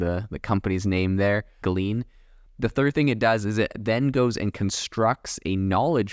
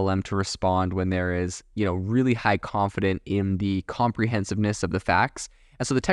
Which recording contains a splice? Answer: first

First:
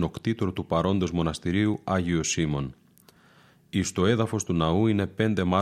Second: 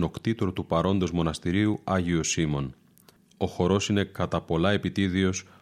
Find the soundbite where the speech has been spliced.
second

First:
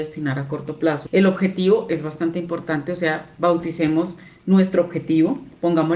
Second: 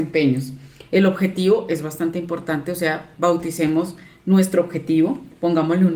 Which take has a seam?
first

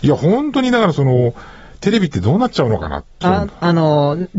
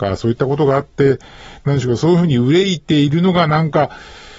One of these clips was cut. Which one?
first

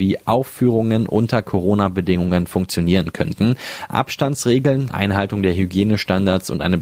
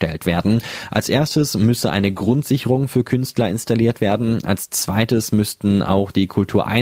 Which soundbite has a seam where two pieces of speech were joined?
first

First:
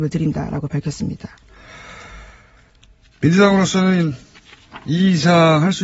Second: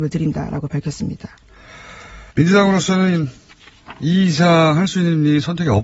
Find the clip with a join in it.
second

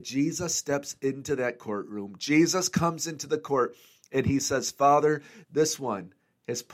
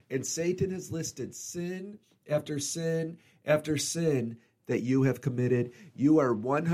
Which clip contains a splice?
first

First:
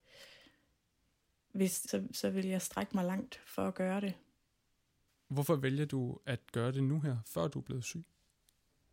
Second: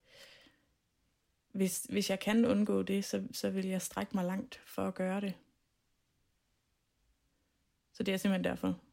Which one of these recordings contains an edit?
first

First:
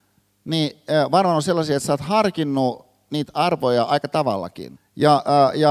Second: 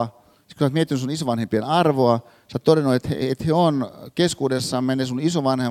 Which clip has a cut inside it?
first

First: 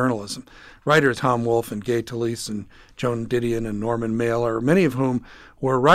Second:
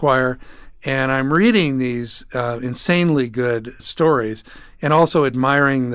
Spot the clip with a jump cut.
first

